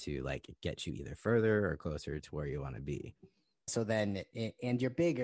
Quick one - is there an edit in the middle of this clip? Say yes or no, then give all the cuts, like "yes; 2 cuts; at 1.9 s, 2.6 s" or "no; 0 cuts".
yes; 1 cut; at 3.7 s